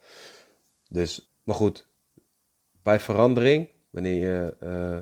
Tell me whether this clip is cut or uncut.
cut